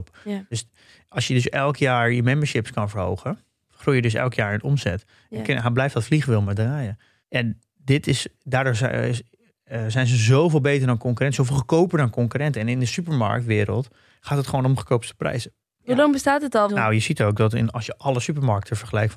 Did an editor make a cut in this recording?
yes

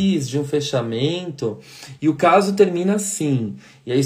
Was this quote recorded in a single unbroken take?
yes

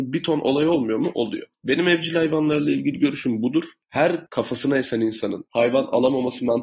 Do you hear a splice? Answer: no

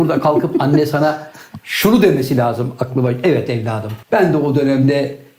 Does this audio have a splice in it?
yes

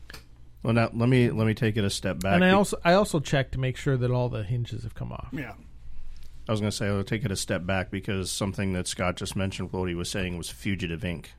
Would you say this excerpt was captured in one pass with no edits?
yes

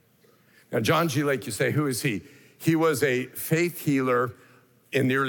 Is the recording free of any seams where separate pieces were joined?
yes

